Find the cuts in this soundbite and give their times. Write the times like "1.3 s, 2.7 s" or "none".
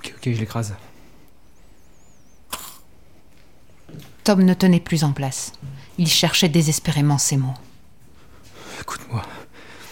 none